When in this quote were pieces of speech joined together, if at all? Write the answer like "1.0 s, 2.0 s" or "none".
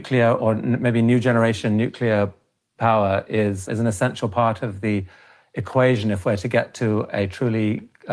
3.7 s